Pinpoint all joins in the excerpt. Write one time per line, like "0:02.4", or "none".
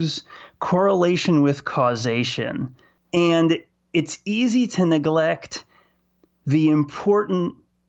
0:03.0

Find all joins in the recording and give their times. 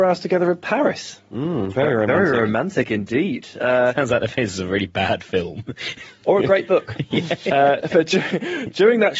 none

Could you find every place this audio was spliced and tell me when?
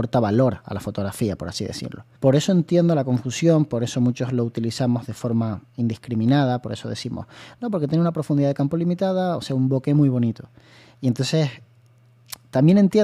0:02.2

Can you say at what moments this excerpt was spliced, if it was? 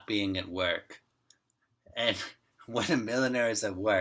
none

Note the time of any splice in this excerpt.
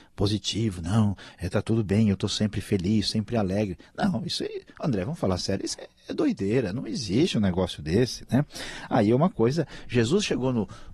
0:05.7

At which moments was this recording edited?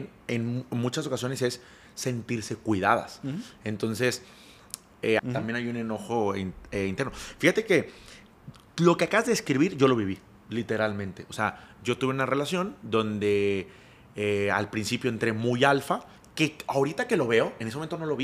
0:05.2

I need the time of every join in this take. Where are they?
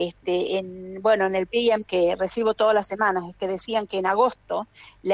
0:01.9

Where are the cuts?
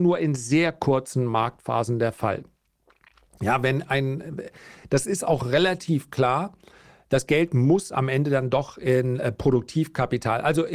none

